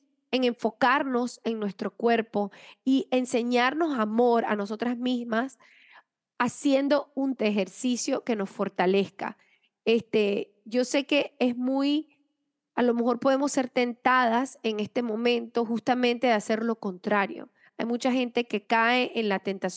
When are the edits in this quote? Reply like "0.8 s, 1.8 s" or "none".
7.4 s